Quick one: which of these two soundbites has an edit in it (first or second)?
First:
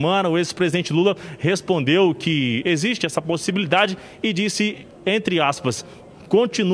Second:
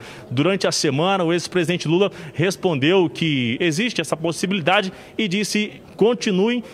second